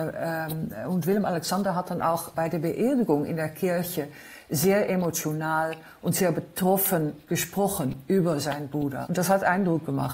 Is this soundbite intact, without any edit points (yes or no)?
no